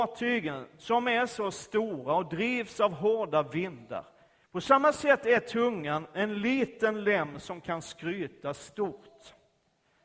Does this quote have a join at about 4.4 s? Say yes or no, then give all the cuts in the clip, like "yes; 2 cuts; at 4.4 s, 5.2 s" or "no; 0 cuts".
yes; 1 cut; at 4.4 s